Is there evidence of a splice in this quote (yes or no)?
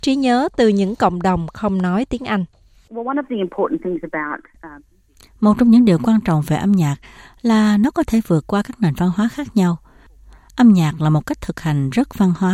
no